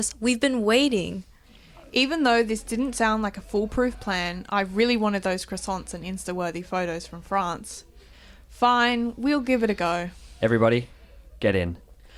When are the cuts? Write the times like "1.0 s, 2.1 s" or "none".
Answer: none